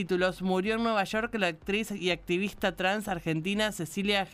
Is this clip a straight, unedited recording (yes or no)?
yes